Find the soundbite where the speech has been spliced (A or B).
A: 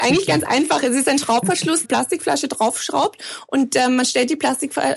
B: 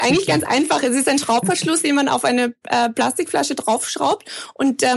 A